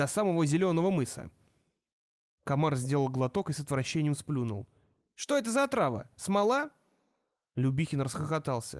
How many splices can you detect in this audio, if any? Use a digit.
0